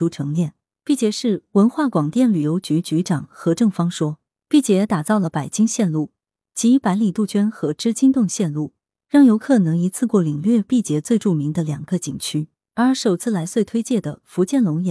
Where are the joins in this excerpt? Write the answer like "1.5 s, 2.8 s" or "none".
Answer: none